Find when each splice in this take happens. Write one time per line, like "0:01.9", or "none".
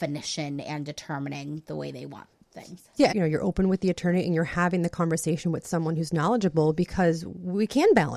0:03.1